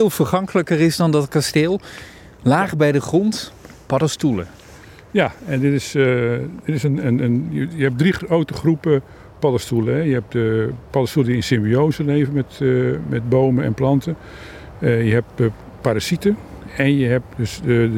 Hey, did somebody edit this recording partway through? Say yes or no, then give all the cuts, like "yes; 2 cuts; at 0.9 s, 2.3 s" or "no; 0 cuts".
no; 0 cuts